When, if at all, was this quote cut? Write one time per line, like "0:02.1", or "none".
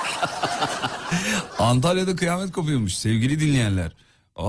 none